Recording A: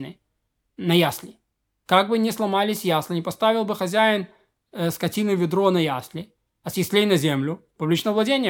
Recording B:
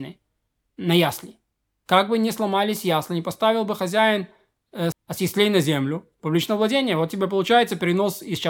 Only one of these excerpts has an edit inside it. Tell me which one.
B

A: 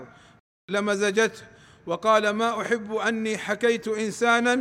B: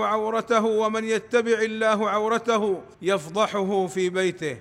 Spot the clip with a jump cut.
B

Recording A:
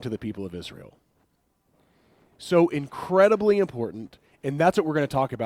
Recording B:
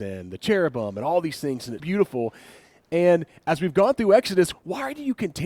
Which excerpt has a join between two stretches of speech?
B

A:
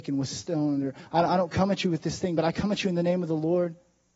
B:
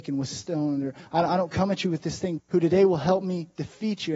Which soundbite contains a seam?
B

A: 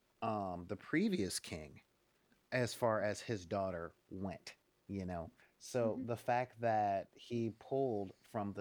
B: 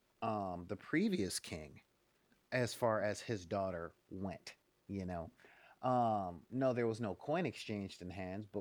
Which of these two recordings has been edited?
A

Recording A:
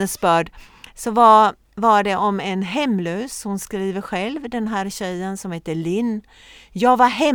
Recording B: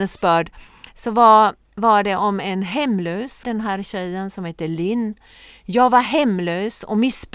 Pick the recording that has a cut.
B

